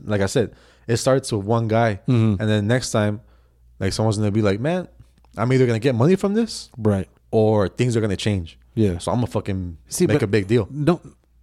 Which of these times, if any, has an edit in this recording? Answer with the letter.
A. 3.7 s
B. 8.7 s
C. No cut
C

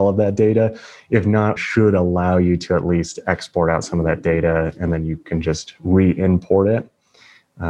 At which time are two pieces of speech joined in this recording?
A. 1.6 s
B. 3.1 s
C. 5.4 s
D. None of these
A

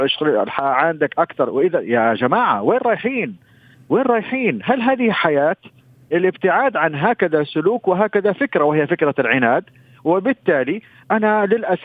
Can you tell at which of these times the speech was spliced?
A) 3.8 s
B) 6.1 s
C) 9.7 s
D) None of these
B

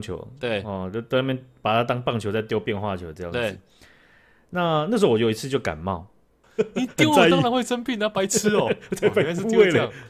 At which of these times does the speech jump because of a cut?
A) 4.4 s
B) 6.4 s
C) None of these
B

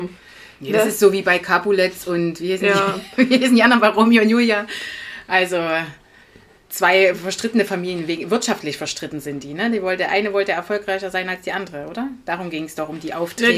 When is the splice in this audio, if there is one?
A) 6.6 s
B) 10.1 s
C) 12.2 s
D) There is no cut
D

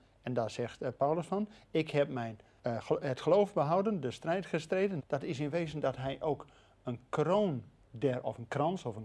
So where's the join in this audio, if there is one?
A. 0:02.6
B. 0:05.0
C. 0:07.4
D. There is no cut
B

